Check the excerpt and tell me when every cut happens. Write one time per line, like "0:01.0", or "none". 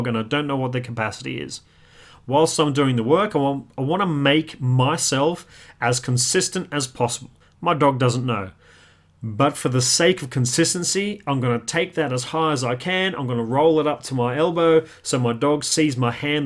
0:07.4